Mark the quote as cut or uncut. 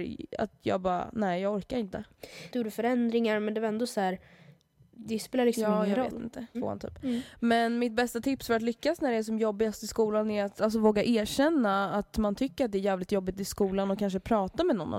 cut